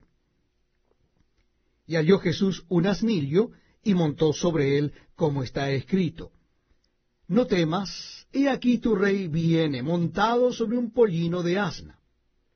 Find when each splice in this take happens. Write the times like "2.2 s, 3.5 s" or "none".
8.3 s